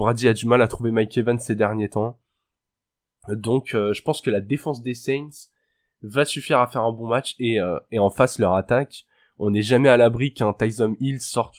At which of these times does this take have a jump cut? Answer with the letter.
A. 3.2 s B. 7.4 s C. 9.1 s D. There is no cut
D